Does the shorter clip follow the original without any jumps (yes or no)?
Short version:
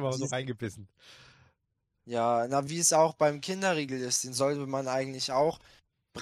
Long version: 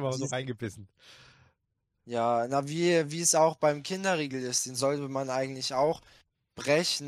no